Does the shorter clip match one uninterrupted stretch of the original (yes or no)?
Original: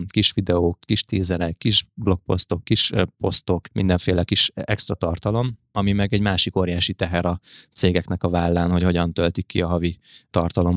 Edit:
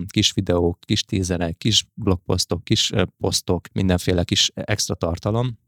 yes